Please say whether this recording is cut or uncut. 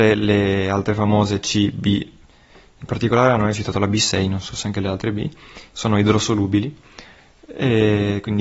uncut